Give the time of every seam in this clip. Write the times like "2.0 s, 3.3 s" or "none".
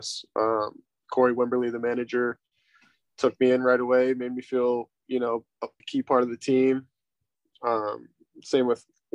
5.8 s